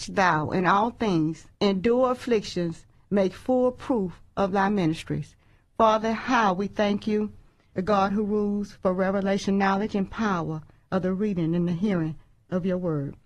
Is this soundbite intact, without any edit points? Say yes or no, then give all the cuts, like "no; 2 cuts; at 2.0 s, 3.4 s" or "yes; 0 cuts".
no; 3 cuts; at 1.5 s, 2.9 s, 7.7 s